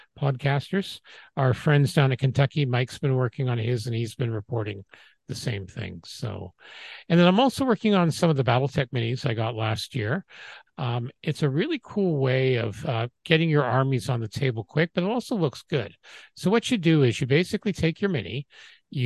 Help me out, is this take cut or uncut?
cut